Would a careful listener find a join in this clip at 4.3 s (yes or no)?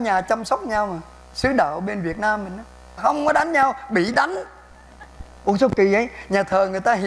no